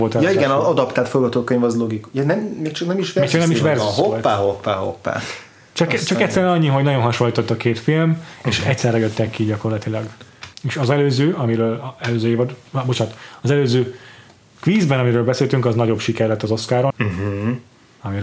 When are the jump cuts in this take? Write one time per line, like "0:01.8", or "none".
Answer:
0:10.5
0:16.9